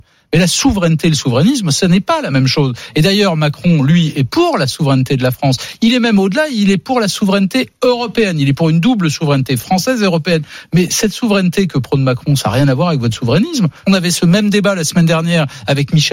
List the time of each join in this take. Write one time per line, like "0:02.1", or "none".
0:13.8